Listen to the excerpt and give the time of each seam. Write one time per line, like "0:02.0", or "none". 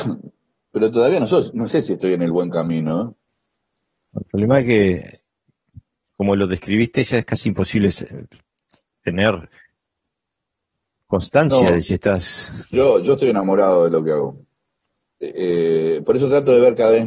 0:12.7
0:15.0